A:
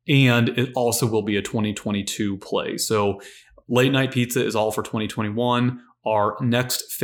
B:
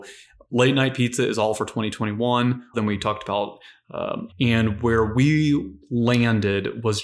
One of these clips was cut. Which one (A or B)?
B